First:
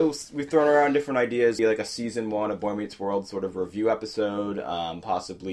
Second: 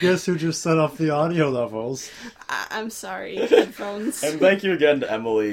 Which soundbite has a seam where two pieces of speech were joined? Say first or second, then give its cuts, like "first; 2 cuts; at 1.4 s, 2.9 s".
first; 1 cut; at 1.6 s